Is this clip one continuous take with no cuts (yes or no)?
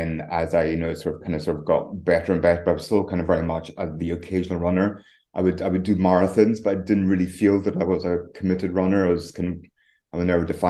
yes